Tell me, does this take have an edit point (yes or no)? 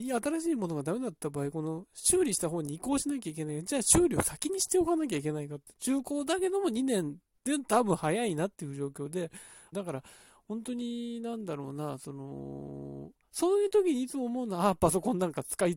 yes